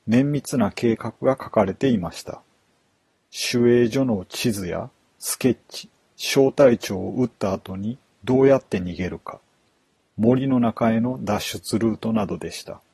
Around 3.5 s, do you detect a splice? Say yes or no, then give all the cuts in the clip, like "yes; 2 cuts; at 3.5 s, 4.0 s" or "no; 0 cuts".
no; 0 cuts